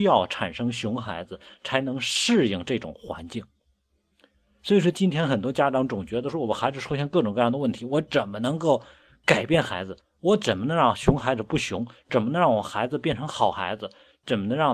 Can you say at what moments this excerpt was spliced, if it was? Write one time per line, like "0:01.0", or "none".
0:10.0